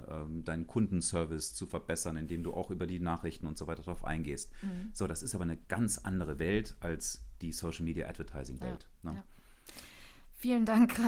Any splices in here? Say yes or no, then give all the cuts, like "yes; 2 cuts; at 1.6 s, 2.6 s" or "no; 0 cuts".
no; 0 cuts